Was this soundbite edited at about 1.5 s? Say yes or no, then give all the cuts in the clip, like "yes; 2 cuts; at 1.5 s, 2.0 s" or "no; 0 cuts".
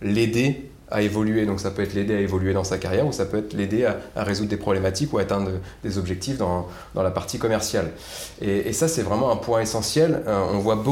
no; 0 cuts